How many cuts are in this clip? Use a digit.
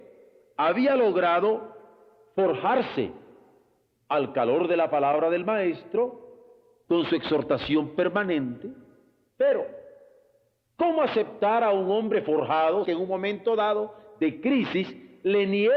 2